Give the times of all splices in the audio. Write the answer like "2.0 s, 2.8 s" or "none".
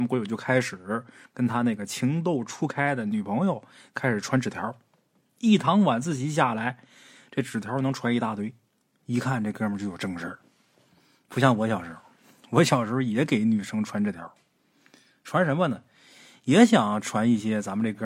none